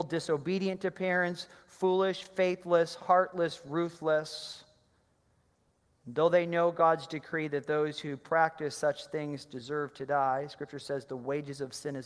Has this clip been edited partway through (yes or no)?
no